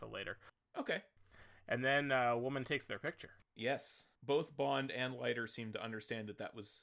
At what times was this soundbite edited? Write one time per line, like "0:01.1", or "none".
0:04.2